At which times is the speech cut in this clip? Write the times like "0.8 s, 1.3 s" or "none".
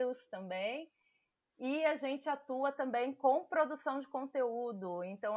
none

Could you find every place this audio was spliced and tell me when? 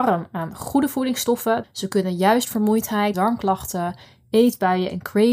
1.6 s, 3.1 s

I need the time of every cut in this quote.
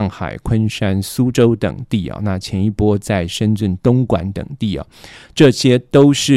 none

